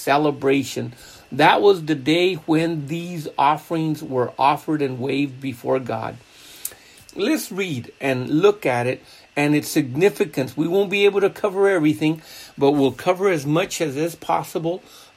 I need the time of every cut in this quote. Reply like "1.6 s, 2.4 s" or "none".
7.0 s